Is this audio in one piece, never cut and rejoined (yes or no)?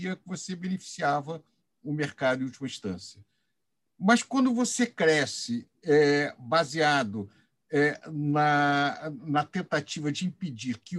yes